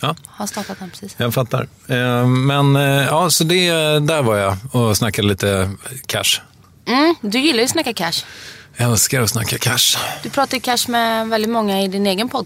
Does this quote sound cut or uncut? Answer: uncut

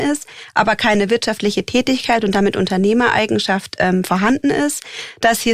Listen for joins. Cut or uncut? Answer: uncut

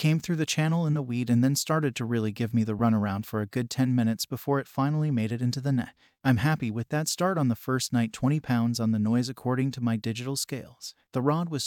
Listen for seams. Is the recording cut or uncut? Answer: uncut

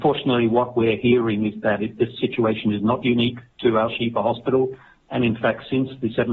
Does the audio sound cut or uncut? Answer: uncut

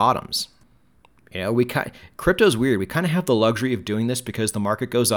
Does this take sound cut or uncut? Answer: uncut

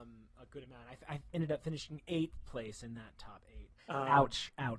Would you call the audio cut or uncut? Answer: cut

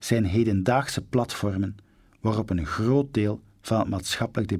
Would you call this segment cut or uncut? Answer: uncut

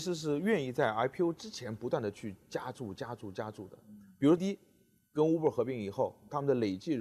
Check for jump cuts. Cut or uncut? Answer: cut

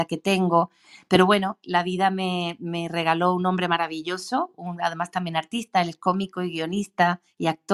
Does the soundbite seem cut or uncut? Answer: uncut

